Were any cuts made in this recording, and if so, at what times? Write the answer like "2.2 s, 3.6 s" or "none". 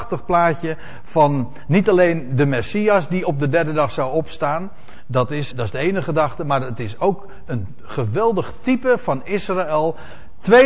5.5 s